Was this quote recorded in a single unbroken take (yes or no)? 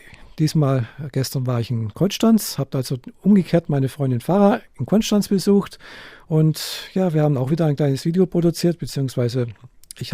yes